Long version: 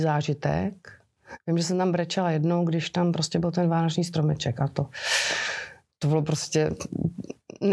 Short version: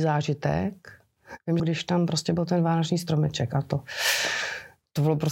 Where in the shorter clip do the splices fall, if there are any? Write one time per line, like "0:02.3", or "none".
0:01.6